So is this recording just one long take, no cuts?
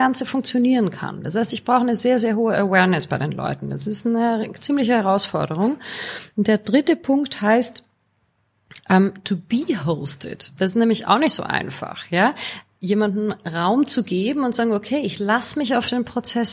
yes; 0 cuts

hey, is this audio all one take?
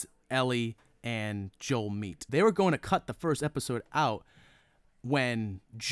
no; 1 cut; at 2.3 s

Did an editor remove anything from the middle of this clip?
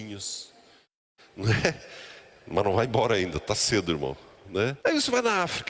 yes; 1 cut; at 4.8 s

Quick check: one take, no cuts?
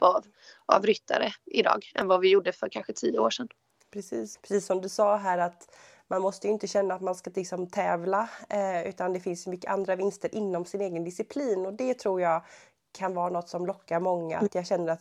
no; 1 cut; at 4.3 s

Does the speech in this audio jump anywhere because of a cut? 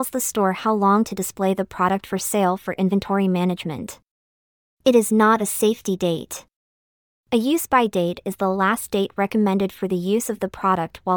no; 0 cuts

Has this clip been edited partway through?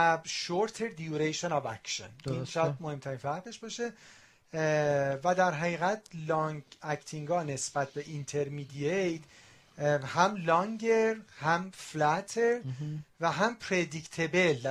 no; 0 cuts

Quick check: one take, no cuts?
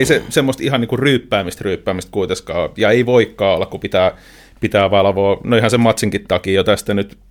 yes; 0 cuts

